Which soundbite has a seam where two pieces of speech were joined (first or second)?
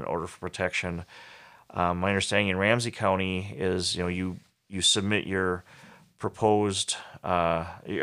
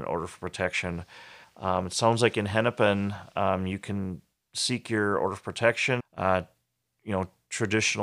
second